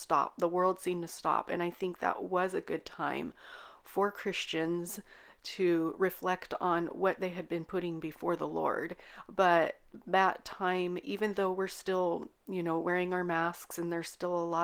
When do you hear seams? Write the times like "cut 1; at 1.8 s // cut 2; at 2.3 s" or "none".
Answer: none

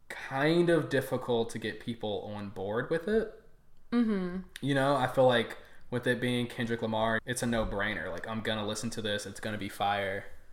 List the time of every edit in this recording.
cut 1; at 7.2 s

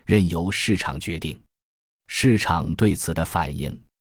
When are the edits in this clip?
none

